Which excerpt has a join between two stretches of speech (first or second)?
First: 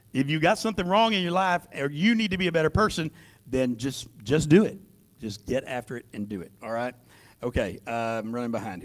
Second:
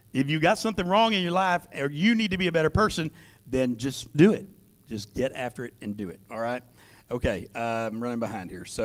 second